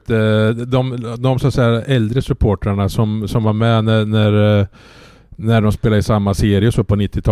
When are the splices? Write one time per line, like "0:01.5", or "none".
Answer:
none